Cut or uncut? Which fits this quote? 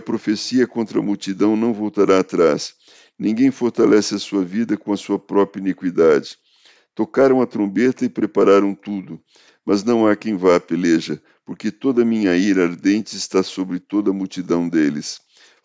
uncut